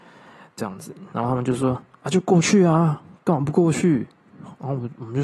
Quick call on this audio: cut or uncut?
uncut